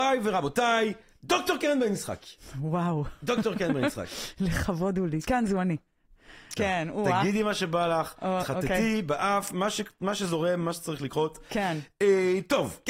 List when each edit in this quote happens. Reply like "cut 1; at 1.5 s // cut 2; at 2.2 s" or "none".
cut 1; at 6.6 s